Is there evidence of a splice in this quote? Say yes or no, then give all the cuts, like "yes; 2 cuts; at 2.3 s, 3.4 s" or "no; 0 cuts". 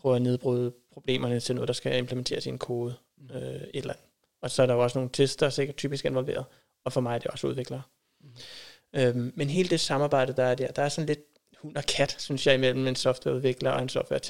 no; 0 cuts